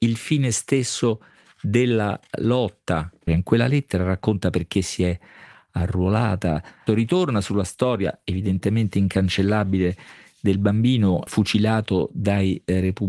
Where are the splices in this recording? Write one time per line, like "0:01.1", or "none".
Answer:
0:03.3
0:06.9
0:11.3